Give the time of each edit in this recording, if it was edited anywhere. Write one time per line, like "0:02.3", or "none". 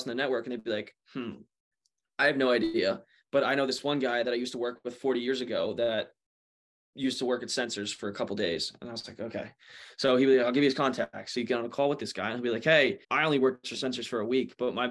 0:13.0

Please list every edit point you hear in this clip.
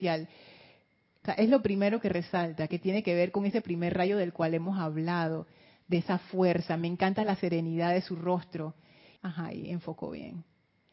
0:01.2
0:09.2

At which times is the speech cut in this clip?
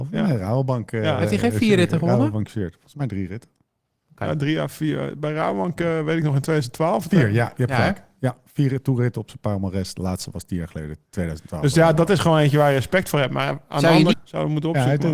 0:14.1

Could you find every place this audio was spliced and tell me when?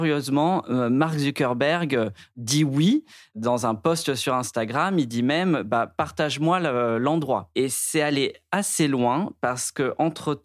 none

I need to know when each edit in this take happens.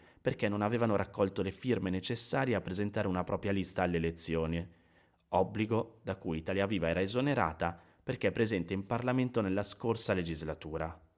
none

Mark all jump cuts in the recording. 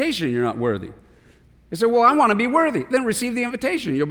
none

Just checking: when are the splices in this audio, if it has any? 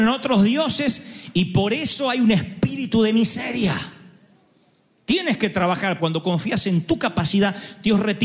0:06.0

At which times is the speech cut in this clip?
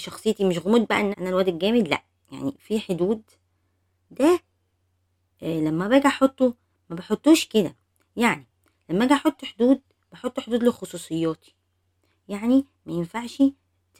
0:01.1

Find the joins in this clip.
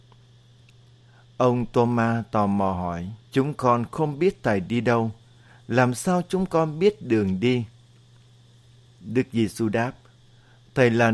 0:03.2

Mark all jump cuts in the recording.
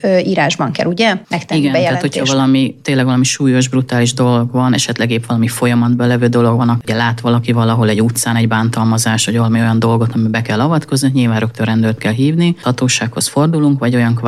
0:12.6

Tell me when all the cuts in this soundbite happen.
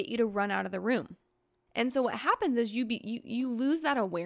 0:01.7

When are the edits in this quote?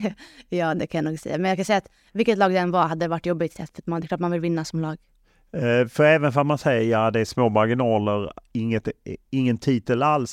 none

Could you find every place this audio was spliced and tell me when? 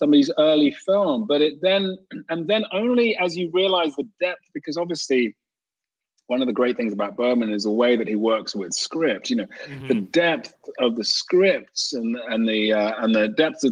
none

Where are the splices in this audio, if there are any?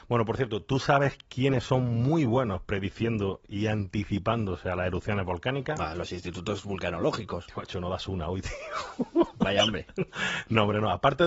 none

